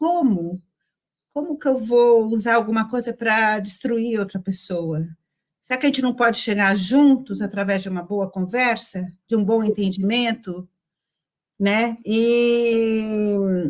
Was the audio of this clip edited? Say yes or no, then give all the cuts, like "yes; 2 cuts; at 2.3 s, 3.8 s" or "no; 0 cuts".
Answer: no; 0 cuts